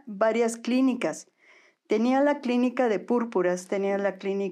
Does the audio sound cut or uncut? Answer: uncut